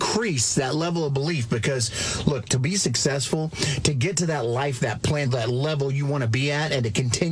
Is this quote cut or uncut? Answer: cut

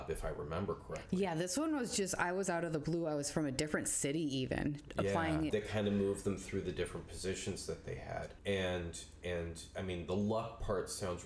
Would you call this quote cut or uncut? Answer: cut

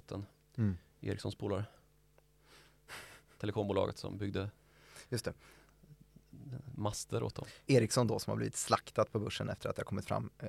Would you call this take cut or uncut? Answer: uncut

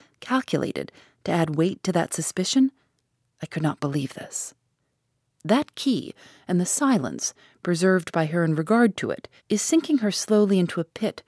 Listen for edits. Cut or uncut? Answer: cut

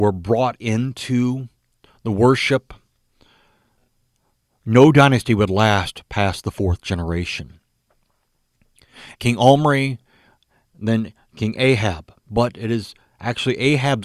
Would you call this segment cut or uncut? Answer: cut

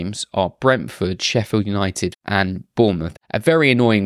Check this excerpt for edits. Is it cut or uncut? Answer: cut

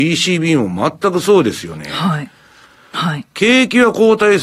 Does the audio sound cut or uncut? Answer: cut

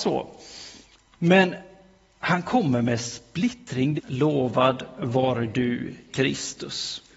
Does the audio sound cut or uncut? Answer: cut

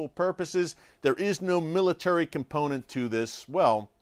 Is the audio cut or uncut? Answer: uncut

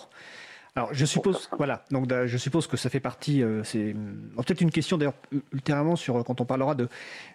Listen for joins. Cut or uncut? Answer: uncut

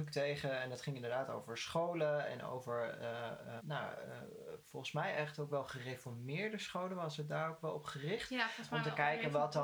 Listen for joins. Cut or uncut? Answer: cut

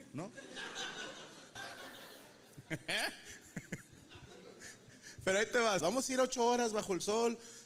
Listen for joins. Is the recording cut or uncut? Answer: cut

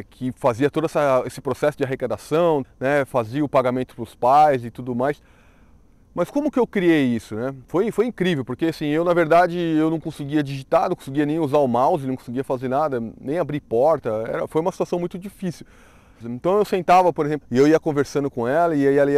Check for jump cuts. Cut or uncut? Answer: cut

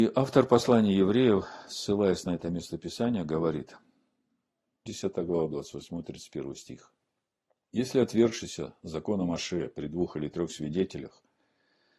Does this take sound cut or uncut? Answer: cut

